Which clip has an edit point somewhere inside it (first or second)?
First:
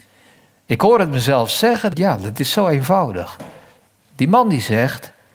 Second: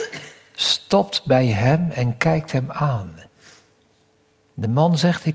first